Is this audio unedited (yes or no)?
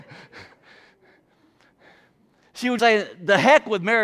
no